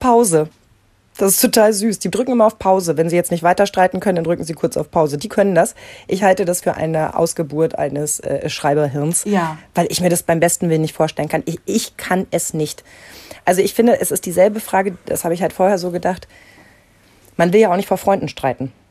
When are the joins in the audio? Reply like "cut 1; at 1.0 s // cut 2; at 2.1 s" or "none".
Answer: cut 1; at 6.6 s